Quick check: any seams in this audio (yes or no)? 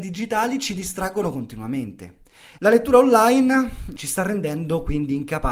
yes